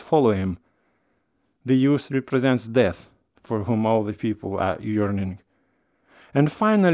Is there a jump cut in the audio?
no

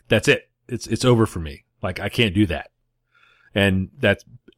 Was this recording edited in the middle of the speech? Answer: no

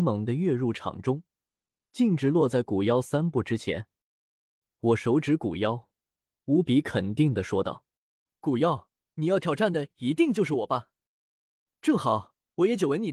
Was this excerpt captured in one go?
yes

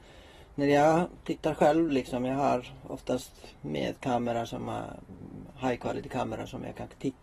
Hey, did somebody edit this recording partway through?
no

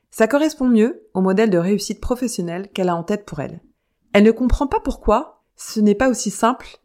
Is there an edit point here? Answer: yes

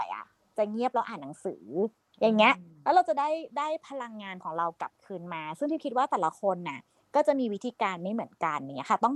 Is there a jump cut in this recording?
no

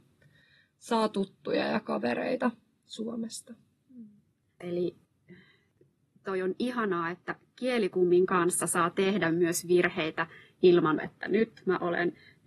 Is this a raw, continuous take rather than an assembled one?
no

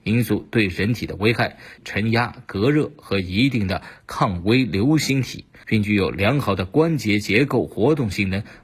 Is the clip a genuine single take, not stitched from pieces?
no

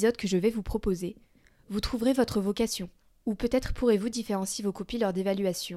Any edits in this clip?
yes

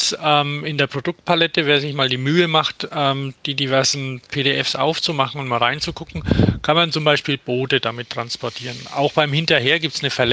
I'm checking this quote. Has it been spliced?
no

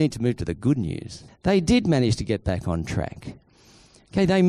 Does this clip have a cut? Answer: yes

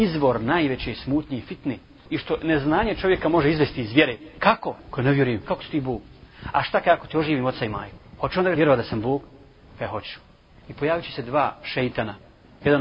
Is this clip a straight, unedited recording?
no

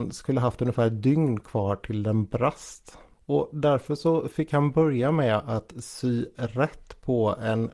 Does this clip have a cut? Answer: yes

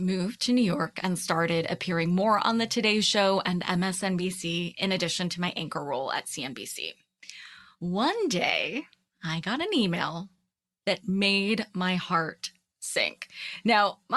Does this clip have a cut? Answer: no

